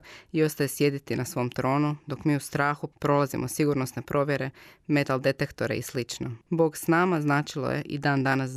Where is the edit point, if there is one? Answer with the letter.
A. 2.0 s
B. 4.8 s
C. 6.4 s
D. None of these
C